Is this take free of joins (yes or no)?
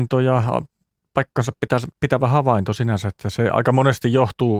yes